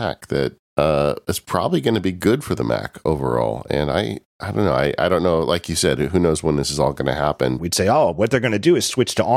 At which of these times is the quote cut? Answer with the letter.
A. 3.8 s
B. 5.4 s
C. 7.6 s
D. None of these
C